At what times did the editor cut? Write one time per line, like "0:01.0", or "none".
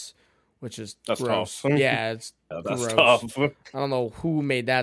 none

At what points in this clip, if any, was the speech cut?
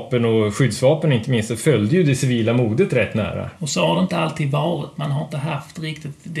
0:03.6

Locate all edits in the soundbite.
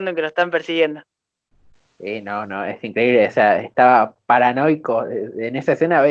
none

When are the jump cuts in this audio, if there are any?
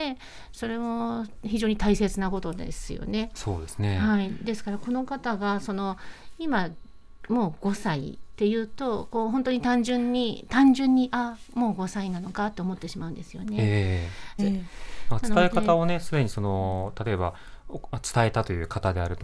0:14.4

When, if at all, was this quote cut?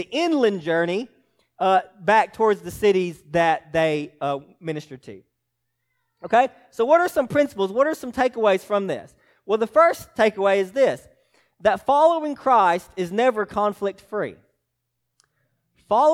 none

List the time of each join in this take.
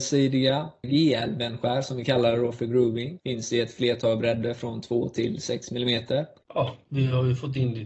0:03.2
0:06.4

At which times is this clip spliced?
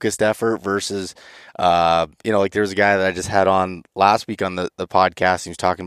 none

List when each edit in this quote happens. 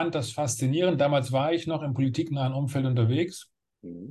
none

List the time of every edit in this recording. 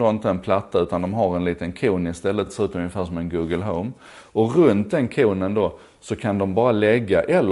none

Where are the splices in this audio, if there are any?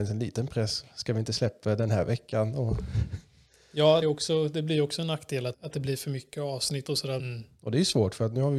0:04.0
0:05.5
0:07.2

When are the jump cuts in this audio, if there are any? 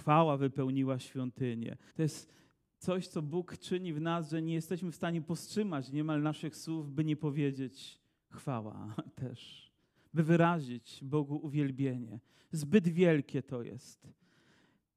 0:01.9

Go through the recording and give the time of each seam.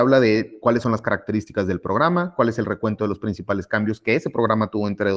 none

